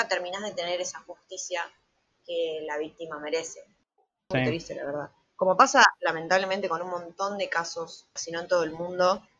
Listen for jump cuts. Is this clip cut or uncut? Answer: cut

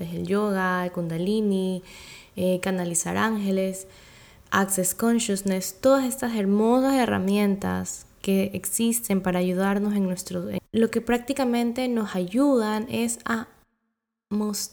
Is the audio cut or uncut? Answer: cut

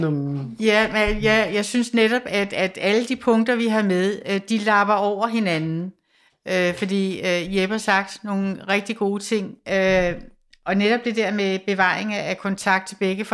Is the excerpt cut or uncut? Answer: uncut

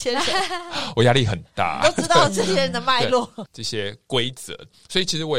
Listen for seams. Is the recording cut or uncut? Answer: cut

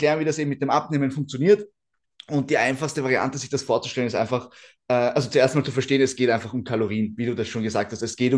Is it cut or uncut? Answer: uncut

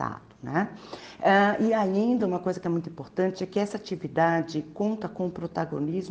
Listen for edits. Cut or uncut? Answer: uncut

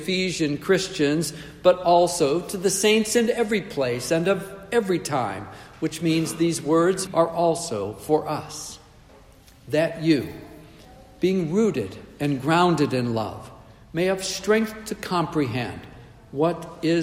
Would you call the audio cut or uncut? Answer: cut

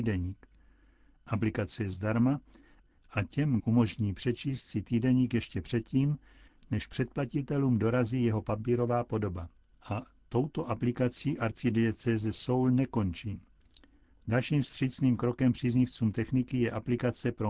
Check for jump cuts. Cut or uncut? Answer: cut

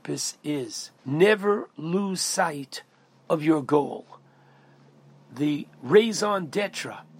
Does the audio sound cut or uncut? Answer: cut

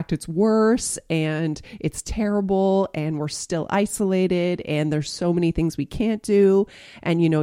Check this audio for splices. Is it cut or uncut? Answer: uncut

